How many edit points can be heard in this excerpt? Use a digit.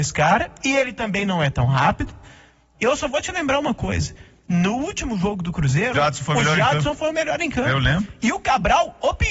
2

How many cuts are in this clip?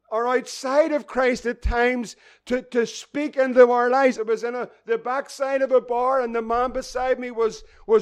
1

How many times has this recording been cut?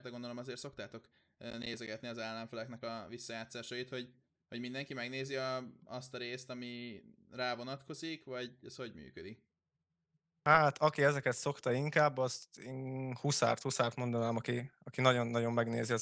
0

